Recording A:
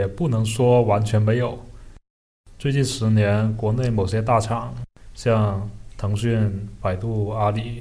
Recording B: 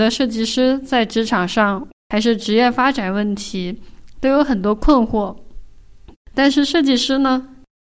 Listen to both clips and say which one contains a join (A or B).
B